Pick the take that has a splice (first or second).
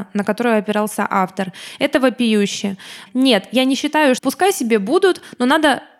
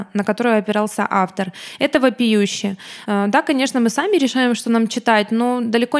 first